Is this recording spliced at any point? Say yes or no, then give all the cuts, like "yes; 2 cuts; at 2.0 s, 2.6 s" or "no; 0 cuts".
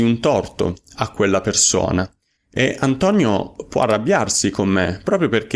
yes; 1 cut; at 2.4 s